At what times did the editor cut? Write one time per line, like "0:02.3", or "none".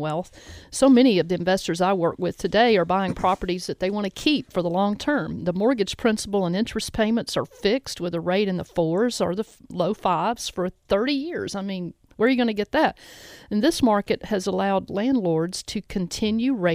none

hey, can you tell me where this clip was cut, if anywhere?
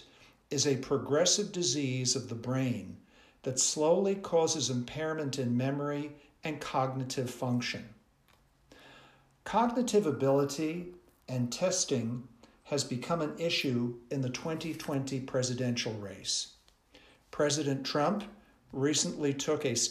none

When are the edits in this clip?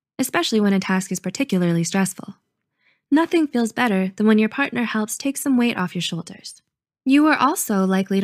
none

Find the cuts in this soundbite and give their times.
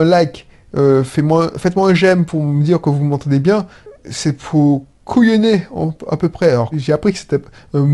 0:06.7

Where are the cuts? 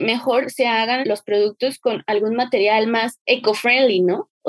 0:01.0

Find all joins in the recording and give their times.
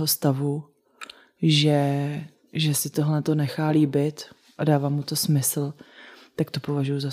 none

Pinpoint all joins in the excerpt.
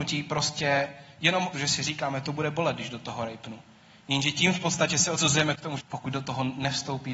0:01.5
0:05.8

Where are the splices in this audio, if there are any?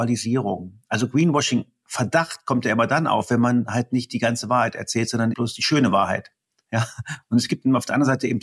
0:05.3
0:07.2

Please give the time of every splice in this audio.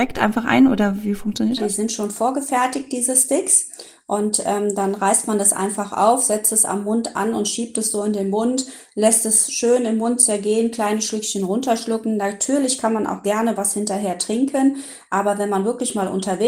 none

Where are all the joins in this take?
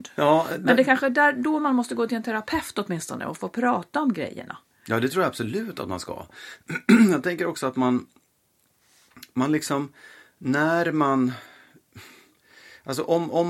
none

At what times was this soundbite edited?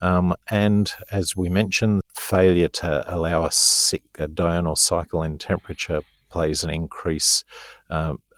0:02.0

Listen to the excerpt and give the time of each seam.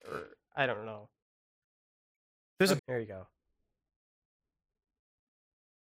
0:02.8

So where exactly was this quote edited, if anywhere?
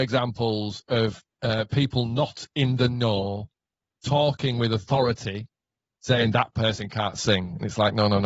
none

